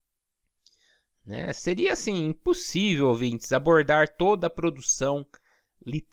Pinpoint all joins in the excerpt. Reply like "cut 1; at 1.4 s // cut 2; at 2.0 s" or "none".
none